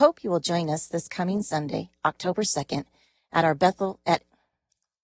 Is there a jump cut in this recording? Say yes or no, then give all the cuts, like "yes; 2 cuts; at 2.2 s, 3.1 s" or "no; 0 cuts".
no; 0 cuts